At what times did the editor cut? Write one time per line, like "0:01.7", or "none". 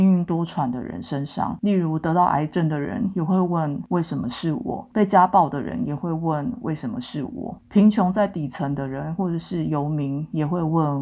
0:07.6